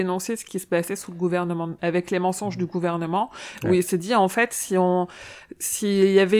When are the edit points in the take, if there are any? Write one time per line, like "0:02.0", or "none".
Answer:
0:01.8